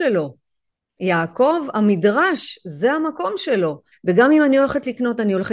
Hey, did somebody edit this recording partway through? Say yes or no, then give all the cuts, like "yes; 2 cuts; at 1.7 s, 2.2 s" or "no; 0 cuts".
yes; 1 cut; at 3.9 s